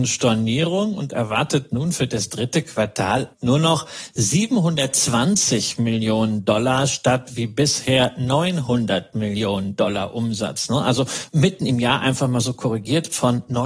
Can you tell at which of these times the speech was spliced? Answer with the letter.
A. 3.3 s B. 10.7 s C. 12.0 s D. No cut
A